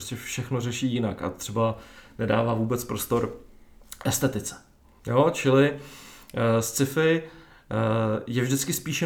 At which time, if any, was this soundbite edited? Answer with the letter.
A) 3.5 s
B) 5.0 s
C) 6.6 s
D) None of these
B